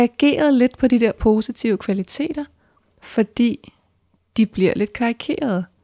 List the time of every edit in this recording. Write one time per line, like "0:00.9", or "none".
none

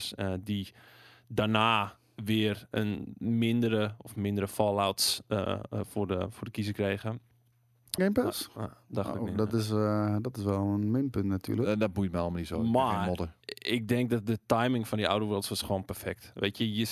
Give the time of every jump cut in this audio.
0:08.0

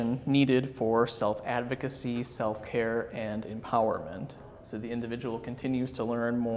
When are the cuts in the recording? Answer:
none

